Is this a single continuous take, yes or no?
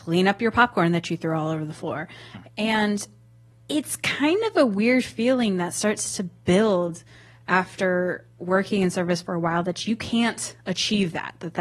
no